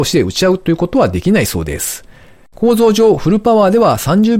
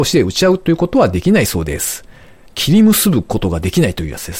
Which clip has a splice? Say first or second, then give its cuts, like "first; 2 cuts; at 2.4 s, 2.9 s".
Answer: first; 1 cut; at 2.5 s